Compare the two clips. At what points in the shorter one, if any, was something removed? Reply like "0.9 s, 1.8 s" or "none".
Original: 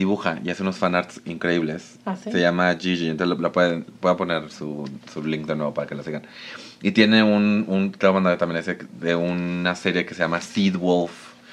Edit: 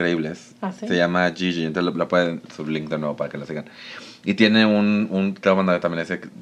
2.5 s